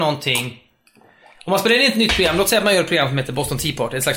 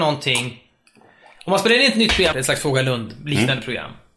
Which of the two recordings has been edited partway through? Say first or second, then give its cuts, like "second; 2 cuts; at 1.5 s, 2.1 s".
second; 1 cut; at 2.3 s